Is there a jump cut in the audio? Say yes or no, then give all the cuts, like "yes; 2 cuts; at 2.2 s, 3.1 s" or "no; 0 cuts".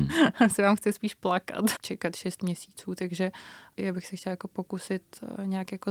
yes; 2 cuts; at 1.8 s, 3.8 s